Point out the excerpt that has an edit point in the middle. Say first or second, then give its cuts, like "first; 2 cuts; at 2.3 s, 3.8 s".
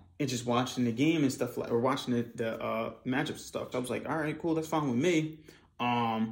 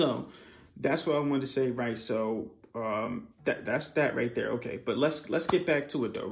first; 1 cut; at 3.7 s